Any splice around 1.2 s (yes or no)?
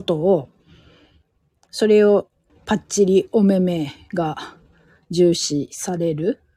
no